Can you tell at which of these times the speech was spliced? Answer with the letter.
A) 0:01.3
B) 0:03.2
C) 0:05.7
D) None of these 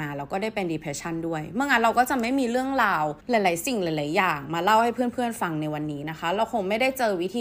B